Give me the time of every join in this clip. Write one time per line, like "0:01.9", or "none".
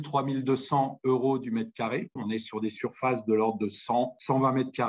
0:02.2

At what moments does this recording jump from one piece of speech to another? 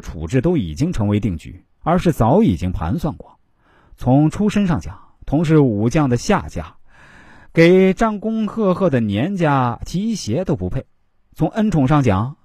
0:01.8

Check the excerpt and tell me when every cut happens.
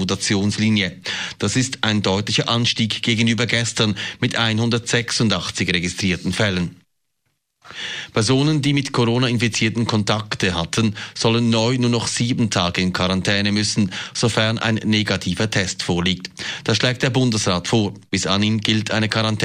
none

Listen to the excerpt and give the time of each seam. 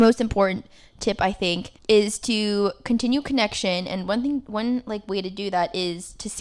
0:01.8

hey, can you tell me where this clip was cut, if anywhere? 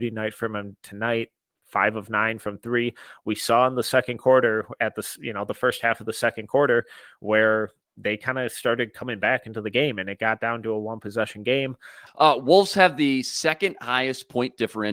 0:12.1

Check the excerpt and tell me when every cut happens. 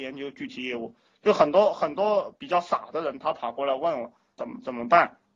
0:04.4

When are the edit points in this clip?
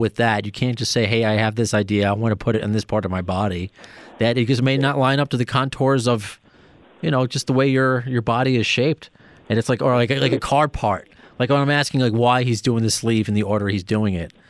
none

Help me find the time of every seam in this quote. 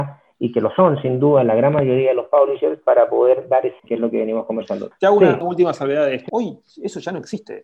0:03.8
0:06.3

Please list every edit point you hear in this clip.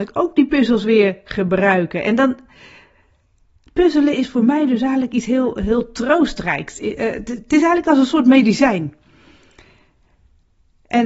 none

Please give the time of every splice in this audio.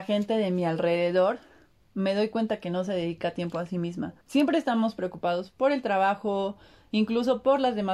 0:04.2

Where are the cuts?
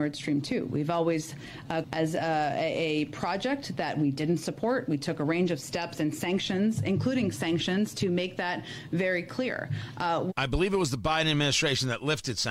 0:01.8

